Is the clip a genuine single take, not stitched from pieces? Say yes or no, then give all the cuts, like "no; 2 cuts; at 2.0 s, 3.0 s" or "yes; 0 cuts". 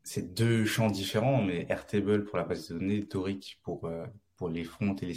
yes; 0 cuts